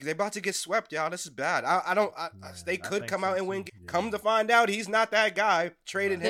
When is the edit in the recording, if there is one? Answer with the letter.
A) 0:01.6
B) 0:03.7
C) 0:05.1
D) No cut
B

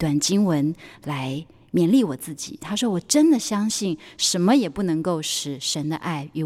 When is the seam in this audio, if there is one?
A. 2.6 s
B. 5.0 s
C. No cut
A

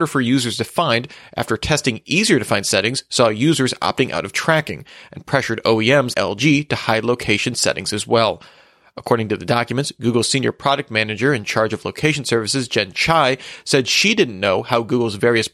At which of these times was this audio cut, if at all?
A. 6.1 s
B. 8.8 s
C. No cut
A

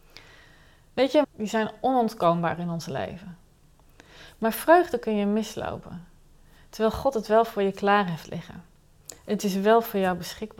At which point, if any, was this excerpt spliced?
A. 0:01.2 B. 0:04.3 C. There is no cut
A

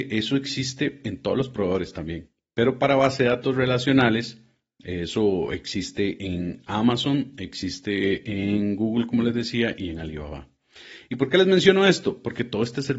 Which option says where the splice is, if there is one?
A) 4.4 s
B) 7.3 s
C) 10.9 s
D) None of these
D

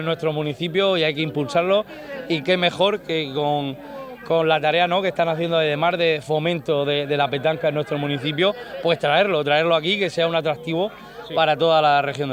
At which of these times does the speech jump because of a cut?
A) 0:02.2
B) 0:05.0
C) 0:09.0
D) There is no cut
D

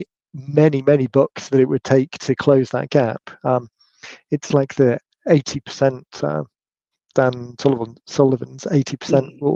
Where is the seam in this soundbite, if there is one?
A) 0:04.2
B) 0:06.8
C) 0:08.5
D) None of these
D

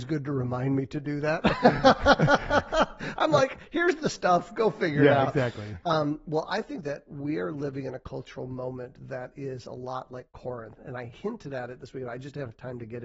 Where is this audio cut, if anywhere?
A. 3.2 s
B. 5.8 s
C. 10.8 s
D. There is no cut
C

